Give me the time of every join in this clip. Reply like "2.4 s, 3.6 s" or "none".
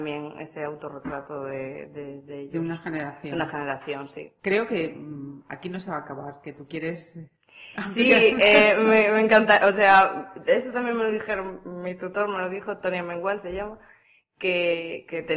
none